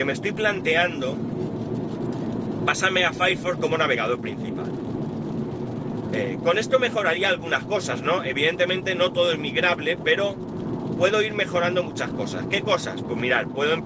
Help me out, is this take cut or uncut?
uncut